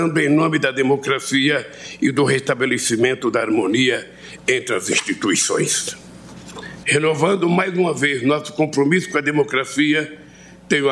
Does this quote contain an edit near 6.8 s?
yes; 1 cut; at 6.8 s

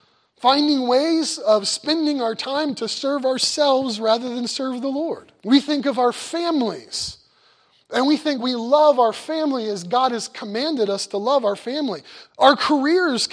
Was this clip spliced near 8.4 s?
yes; 3 cuts; at 5.4 s, 8.4 s, 12.3 s

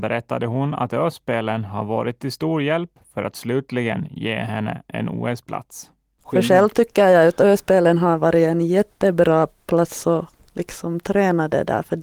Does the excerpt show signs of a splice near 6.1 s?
no; 0 cuts

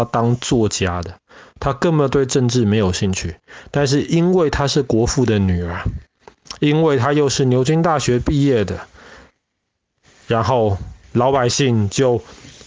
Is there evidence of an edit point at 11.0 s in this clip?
yes; 1 cut; at 11.0 s

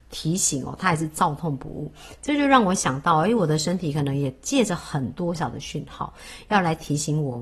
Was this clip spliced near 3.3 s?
no; 1 cut; at 5.3 s

